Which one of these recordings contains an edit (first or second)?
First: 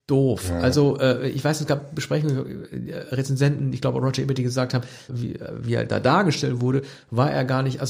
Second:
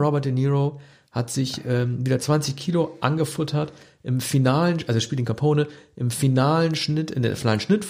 first